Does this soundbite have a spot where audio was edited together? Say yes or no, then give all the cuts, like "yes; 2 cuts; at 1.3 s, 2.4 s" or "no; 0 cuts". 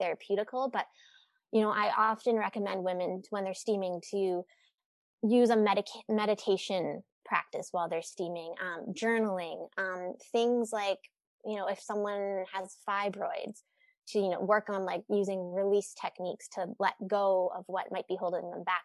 no; 0 cuts